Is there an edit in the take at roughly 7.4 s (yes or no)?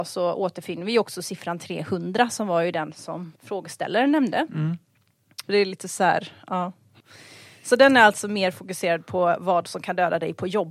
no